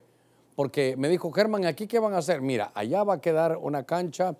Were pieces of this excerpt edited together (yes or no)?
no